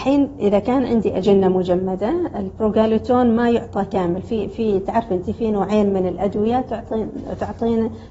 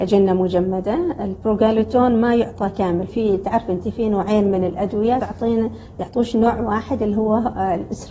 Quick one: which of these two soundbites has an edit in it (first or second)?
second